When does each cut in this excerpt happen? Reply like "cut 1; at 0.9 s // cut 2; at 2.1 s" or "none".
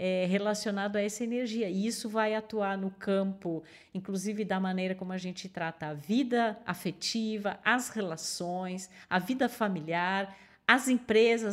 none